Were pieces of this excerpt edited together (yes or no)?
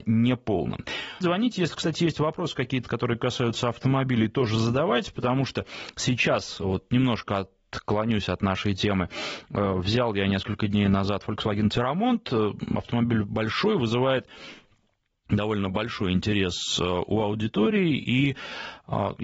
yes